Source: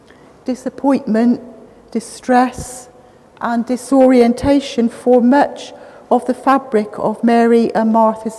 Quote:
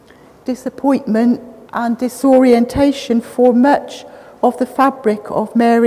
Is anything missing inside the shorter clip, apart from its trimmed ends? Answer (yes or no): yes